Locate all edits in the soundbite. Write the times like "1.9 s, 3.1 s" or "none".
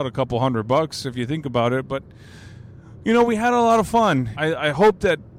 4.3 s